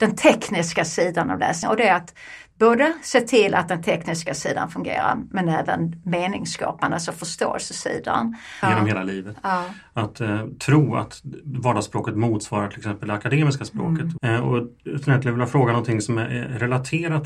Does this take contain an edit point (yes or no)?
yes